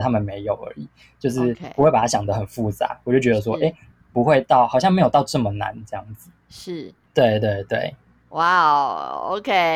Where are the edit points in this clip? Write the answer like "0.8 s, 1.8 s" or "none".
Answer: 7.1 s